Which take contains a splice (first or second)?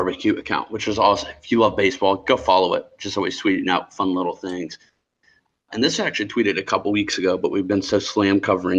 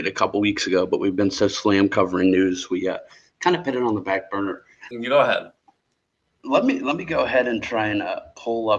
second